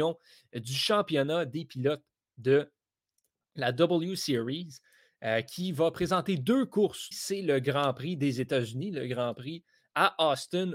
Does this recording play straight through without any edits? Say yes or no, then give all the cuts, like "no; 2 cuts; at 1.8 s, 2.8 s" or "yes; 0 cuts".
no; 1 cut; at 7.1 s